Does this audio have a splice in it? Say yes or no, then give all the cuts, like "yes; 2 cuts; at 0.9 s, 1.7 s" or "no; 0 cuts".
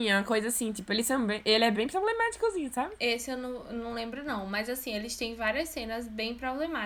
no; 0 cuts